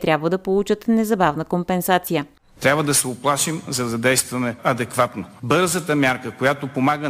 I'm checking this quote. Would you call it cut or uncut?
uncut